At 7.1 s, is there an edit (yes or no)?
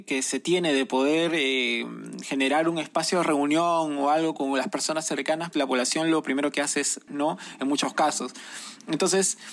yes